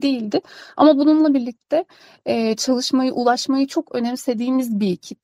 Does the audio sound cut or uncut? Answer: uncut